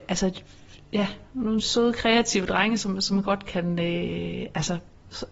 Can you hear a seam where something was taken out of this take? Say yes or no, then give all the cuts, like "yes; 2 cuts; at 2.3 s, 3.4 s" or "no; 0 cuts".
yes; 1 cut; at 1.6 s